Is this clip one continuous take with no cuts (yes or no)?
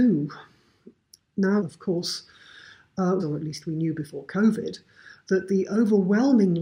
no